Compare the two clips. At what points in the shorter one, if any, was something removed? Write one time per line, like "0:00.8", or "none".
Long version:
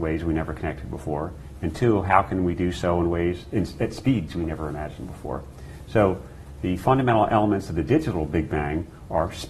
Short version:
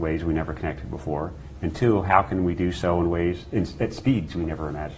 none